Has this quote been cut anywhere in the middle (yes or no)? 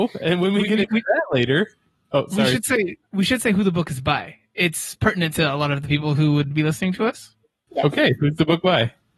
no